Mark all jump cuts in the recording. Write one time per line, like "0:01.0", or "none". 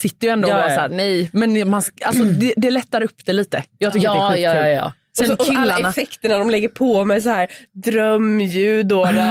none